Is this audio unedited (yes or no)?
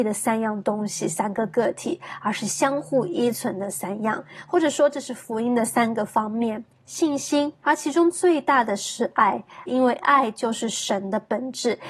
no